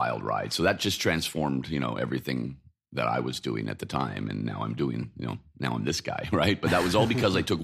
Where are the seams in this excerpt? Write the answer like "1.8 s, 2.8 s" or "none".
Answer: none